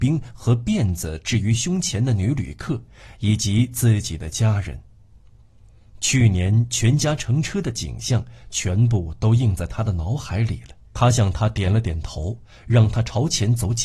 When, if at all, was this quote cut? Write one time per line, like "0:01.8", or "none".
0:10.9